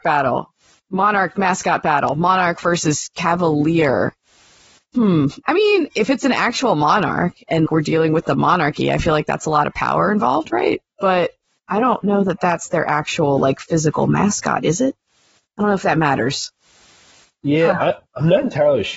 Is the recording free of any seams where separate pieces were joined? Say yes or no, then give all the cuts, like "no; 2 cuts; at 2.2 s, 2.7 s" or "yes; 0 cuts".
no; 1 cut; at 7.7 s